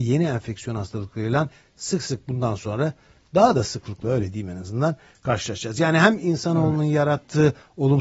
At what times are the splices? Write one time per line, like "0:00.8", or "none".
none